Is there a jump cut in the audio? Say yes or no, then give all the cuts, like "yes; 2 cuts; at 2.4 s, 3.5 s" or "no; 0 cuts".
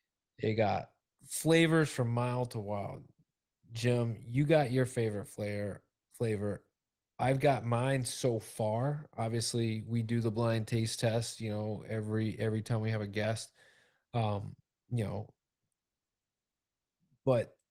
no; 0 cuts